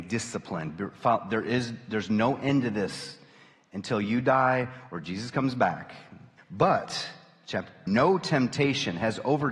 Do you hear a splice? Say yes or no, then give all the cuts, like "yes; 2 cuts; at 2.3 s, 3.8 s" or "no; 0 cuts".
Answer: yes; 2 cuts; at 6.4 s, 7.9 s